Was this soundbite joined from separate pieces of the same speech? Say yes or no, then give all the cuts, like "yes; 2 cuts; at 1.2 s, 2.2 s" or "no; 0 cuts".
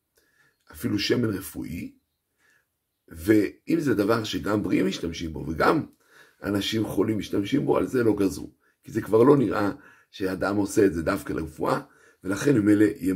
no; 0 cuts